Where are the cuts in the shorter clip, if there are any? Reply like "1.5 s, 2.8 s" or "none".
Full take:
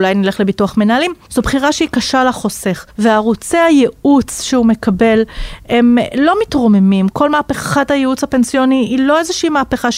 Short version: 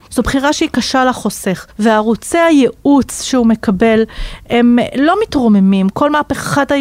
none